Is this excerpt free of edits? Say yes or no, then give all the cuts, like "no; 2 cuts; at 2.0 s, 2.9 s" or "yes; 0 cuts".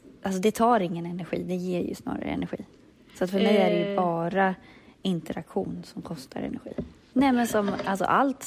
no; 1 cut; at 7.1 s